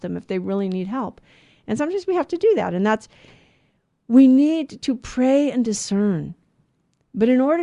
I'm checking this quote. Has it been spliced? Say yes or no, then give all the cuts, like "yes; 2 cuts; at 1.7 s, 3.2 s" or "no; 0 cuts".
no; 0 cuts